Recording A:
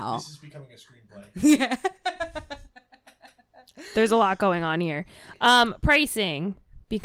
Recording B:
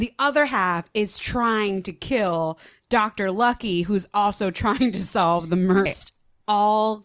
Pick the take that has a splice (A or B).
B